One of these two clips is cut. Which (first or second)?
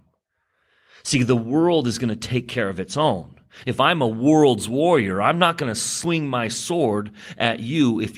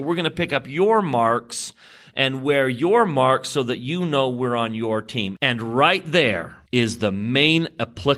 second